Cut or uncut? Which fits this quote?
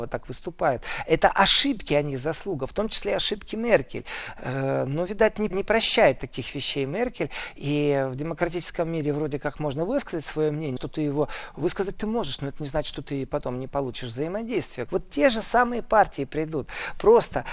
cut